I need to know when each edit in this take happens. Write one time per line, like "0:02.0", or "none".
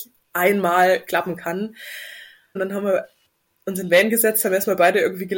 0:02.6